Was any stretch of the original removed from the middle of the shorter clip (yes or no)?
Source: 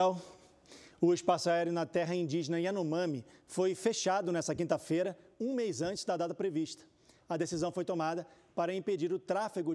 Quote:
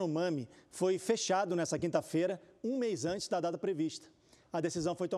no